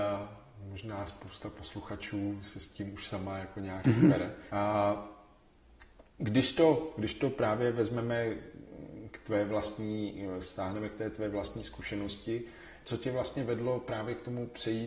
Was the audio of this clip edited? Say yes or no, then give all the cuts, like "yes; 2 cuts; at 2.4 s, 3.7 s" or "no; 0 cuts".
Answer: yes; 3 cuts; at 4.5 s, 6.1 s, 12.8 s